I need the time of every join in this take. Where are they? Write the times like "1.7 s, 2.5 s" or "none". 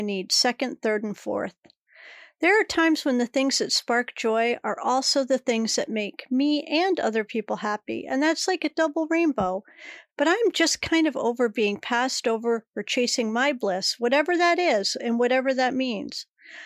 none